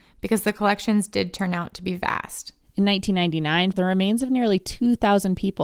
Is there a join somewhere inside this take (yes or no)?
yes